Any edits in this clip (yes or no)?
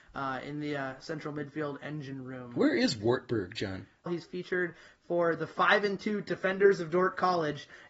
yes